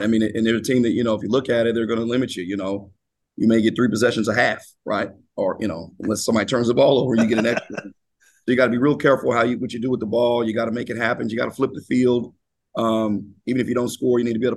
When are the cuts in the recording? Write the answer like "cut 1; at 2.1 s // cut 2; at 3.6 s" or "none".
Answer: none